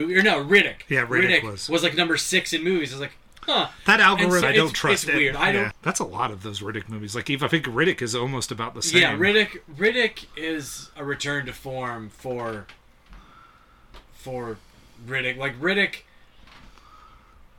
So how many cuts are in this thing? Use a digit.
2